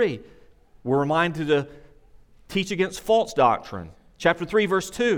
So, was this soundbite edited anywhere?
no; 0 cuts

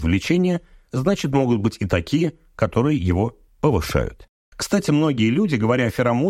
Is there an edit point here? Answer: no; 0 cuts

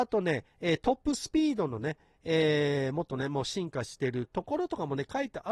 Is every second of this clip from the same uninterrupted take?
yes; 0 cuts

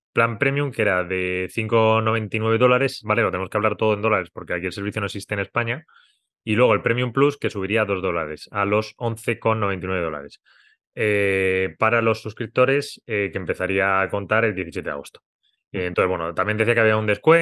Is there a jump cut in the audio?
yes; 1 cut; at 3.0 s

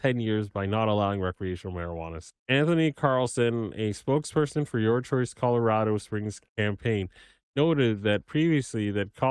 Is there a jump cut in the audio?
yes; 2 cuts; at 2.4 s, 6.5 s

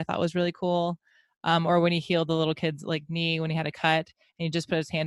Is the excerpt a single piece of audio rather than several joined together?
yes; 0 cuts

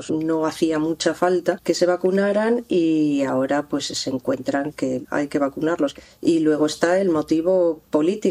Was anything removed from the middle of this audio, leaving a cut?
no; 0 cuts

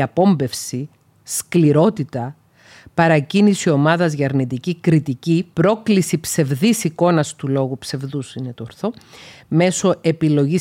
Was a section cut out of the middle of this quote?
yes; 1 cut; at 5.5 s

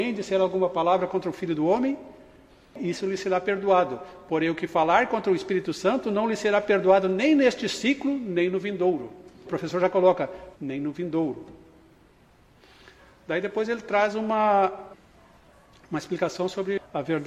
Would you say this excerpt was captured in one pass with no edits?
no; 2 cuts; at 9.4 s, 10.5 s

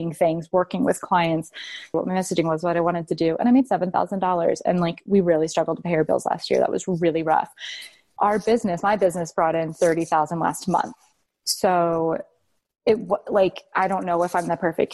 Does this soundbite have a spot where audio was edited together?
yes; 1 cut; at 1.9 s

